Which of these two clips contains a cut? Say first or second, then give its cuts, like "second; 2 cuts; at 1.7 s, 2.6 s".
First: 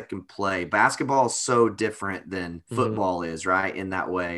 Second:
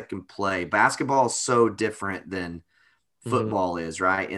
first; 1 cut; at 2.7 s